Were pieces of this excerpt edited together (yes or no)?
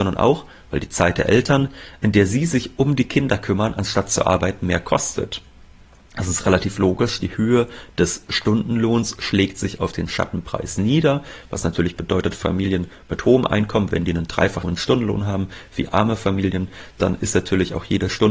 yes